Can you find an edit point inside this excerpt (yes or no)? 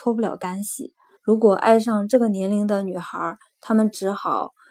yes